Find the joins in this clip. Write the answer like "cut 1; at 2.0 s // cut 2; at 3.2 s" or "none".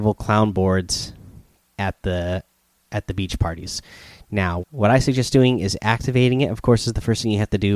cut 1; at 4.6 s